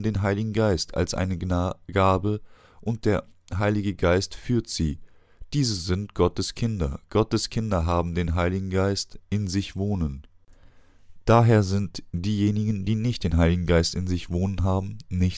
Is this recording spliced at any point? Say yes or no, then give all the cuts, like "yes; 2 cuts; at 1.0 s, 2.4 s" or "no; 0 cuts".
no; 0 cuts